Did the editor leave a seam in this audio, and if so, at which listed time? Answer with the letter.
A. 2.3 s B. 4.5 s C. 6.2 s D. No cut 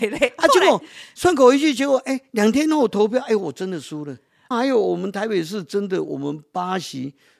B